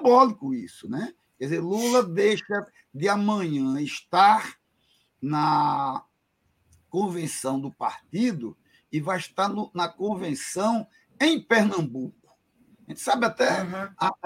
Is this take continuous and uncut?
yes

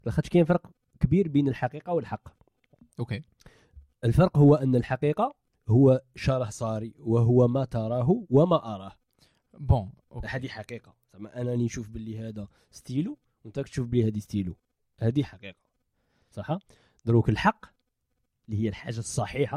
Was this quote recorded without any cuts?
yes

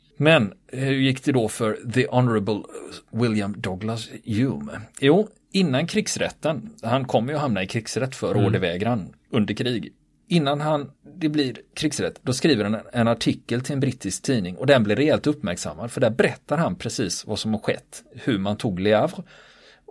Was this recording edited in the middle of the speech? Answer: no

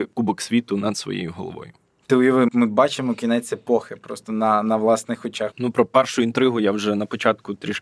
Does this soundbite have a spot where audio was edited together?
yes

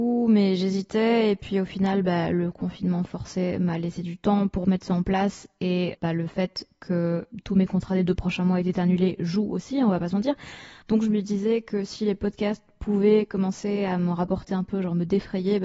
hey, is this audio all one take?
no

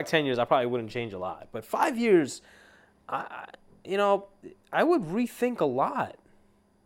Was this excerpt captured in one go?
yes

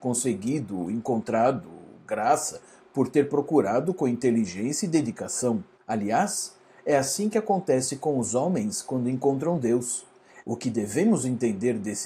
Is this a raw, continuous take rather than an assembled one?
no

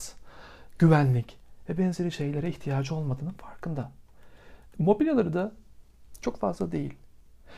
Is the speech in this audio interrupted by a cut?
yes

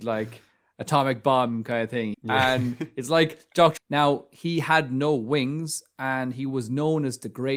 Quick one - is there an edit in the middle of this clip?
yes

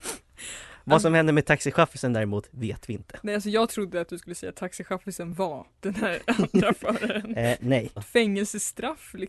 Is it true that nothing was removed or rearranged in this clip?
no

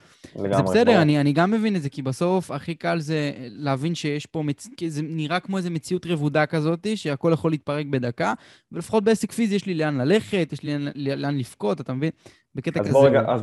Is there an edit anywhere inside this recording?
no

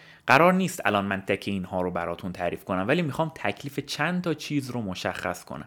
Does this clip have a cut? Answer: yes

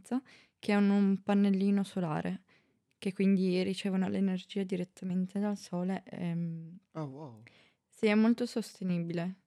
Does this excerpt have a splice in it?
no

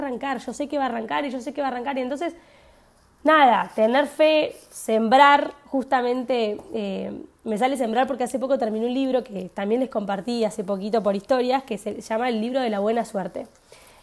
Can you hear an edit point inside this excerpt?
no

